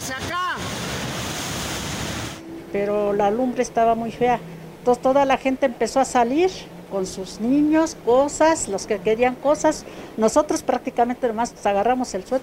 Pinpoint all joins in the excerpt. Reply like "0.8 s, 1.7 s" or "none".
none